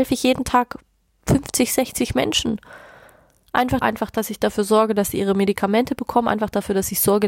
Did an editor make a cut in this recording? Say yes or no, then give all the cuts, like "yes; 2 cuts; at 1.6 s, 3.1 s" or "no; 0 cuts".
yes; 1 cut; at 3.8 s